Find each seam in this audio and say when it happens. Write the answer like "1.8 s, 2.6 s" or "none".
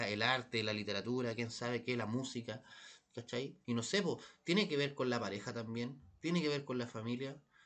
3.6 s